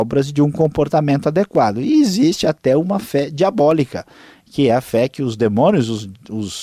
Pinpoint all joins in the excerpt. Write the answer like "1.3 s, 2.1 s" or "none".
none